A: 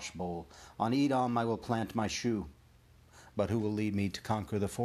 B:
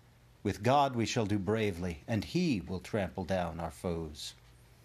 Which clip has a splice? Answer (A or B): A